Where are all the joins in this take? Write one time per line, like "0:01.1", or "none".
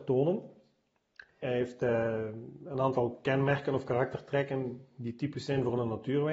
0:01.4